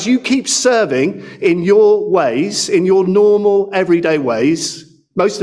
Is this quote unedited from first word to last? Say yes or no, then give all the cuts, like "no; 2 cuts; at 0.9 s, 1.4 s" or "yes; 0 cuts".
yes; 0 cuts